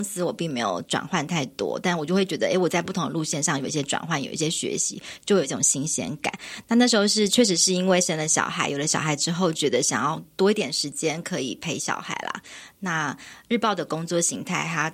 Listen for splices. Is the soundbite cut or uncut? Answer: uncut